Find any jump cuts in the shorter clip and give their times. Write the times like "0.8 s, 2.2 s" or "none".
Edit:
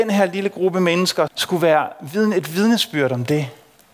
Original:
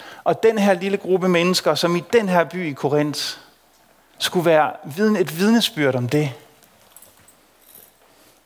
1.3 s